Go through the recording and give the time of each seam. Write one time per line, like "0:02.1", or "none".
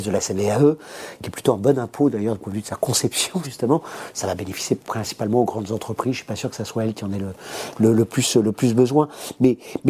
0:03.4